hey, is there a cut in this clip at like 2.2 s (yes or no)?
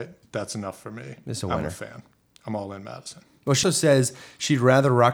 no